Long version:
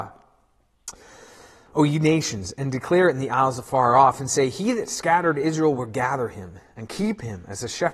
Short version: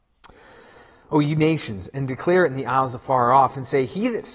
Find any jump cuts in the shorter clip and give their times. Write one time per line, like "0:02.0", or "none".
none